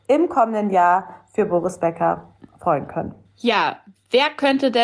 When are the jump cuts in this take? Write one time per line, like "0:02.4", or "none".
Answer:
none